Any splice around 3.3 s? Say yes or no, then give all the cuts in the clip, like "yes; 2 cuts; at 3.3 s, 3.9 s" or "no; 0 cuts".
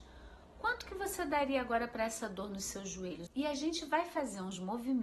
yes; 1 cut; at 3.3 s